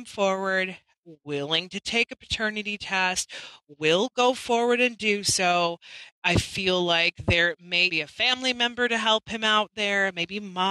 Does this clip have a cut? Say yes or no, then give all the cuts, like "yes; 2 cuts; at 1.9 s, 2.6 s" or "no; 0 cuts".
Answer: yes; 1 cut; at 7.9 s